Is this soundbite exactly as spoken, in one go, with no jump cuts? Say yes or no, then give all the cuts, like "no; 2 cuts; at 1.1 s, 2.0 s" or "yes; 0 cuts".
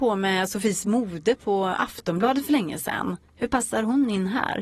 yes; 0 cuts